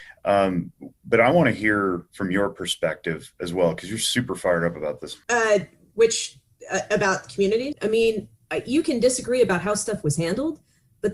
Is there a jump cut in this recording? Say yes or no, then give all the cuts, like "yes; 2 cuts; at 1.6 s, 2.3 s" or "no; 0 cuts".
yes; 2 cuts; at 5.2 s, 7.7 s